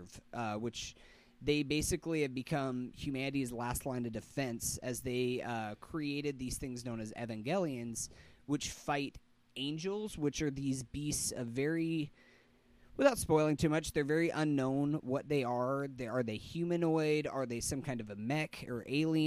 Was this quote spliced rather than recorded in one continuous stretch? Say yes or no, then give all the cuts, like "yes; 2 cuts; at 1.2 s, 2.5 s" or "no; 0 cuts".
no; 0 cuts